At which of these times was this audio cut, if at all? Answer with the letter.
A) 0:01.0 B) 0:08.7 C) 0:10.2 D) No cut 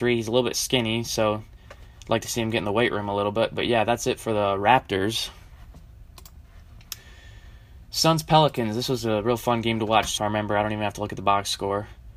C